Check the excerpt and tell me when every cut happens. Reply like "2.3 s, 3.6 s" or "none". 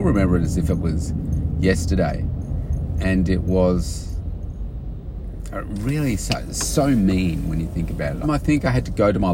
8.2 s